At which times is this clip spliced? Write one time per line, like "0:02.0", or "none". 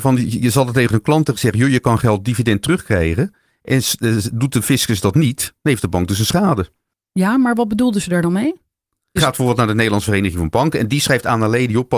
0:09.2